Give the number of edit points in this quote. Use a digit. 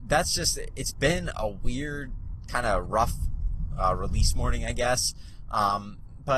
0